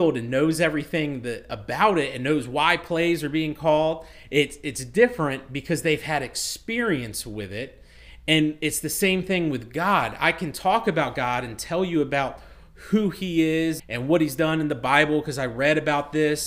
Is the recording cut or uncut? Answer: cut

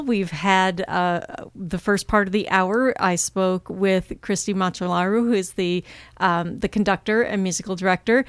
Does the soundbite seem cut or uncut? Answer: uncut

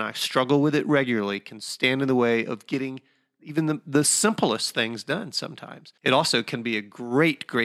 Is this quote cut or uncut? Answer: cut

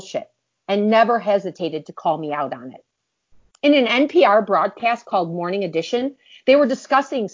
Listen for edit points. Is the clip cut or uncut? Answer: uncut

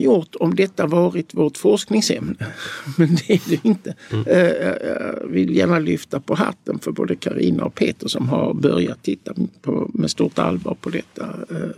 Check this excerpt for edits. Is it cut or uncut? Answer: cut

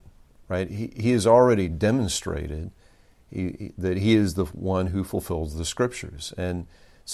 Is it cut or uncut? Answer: uncut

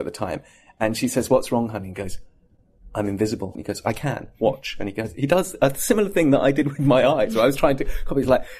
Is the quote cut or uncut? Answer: cut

